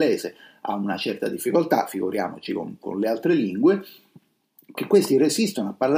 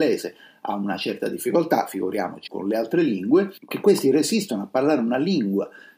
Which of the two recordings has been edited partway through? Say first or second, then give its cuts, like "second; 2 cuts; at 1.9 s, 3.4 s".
second; 2 cuts; at 2.5 s, 3.6 s